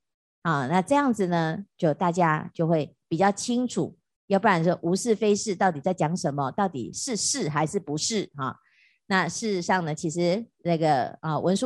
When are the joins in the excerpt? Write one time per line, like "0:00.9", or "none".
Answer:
none